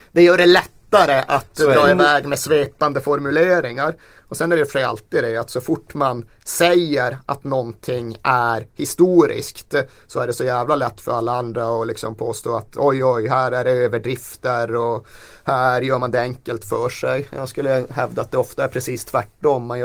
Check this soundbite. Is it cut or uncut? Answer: uncut